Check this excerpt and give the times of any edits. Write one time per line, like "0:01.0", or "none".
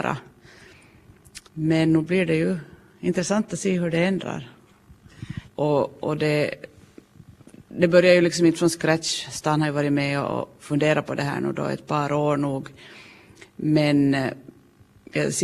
0:01.5
0:05.5